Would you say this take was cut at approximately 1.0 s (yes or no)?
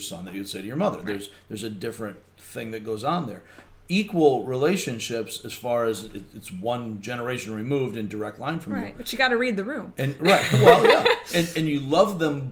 no